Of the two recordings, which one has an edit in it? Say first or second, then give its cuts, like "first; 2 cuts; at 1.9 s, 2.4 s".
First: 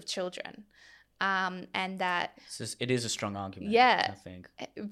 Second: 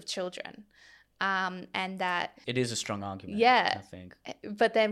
second; 1 cut; at 2.4 s